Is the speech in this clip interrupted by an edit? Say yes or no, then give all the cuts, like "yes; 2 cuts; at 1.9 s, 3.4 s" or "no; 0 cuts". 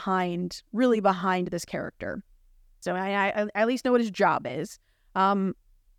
yes; 1 cut; at 2.8 s